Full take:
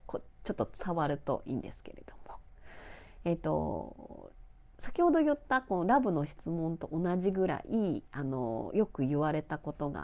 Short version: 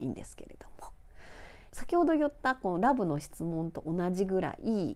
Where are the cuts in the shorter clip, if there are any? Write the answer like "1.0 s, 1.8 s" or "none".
1.7 s